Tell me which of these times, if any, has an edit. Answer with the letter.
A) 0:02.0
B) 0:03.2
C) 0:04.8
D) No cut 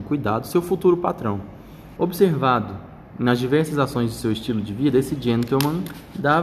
A